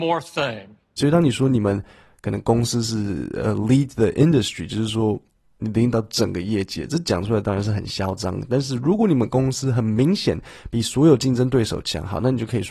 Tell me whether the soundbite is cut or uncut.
cut